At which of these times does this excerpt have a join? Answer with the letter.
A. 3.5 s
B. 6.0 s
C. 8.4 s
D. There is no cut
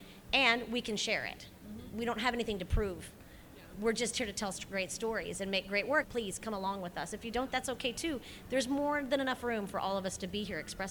B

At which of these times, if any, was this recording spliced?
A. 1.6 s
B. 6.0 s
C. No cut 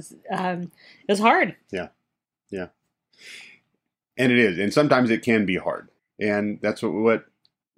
B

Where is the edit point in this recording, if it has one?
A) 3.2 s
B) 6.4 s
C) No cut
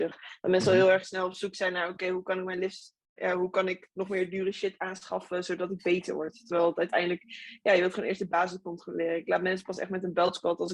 A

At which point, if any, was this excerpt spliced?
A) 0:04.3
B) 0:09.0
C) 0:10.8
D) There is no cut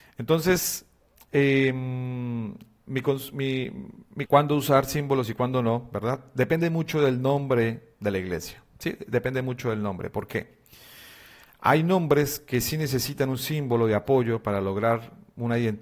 A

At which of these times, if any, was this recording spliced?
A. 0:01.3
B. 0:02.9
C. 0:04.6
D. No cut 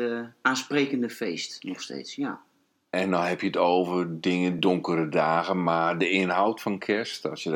D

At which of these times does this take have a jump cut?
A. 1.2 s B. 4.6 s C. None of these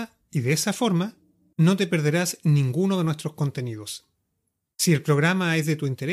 C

